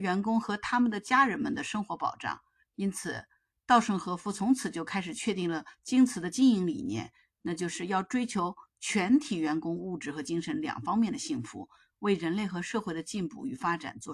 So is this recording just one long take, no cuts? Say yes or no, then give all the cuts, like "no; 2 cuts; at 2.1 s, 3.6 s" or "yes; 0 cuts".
yes; 0 cuts